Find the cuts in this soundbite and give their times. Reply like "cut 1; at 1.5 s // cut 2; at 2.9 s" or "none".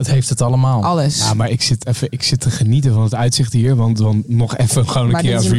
none